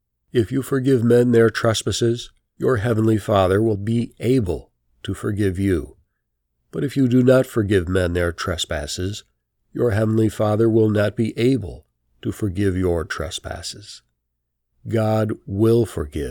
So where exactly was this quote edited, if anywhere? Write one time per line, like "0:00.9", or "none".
0:03.7
0:14.7